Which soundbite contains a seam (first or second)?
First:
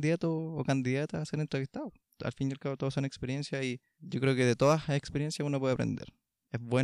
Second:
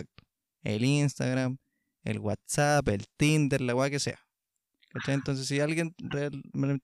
first